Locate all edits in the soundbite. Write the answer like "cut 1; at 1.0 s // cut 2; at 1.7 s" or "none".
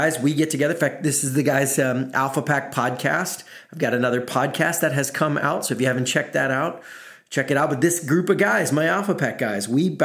none